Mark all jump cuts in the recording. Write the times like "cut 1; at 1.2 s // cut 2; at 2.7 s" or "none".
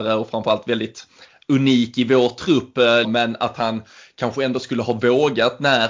cut 1; at 3.0 s

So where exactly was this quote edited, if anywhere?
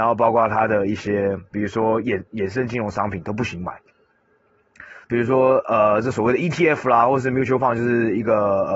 cut 1; at 5.0 s

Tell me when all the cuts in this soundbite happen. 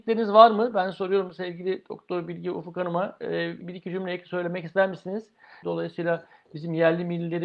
cut 1; at 3.6 s // cut 2; at 5.6 s

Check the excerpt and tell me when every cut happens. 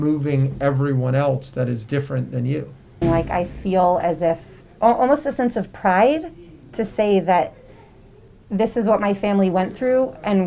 cut 1; at 3.0 s // cut 2; at 4.7 s

